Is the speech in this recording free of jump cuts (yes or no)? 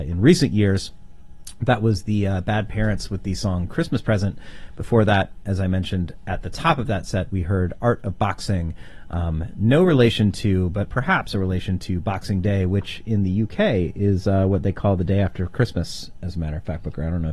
yes